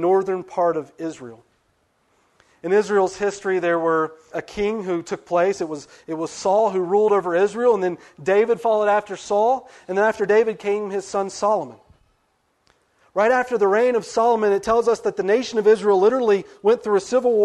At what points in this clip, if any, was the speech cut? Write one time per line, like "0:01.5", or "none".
0:04.3